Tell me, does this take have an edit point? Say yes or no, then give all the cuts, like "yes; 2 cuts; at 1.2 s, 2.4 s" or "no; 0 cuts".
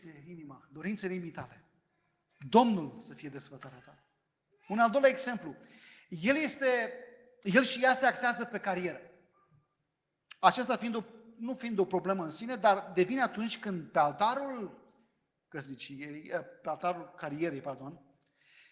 no; 0 cuts